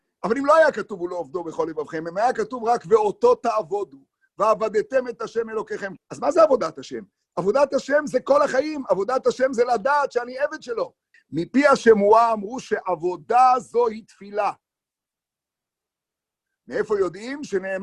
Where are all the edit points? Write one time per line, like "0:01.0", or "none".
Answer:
0:06.0
0:11.1